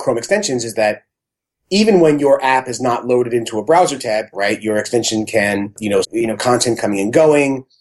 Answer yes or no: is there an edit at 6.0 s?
yes